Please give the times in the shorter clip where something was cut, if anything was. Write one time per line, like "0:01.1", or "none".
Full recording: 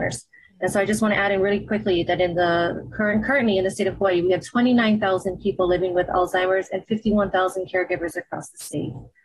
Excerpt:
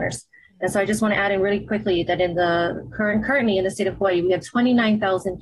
none